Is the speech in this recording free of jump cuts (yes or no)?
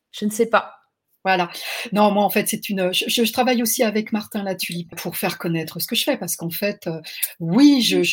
no